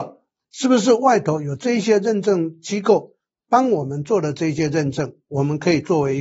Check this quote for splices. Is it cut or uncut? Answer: uncut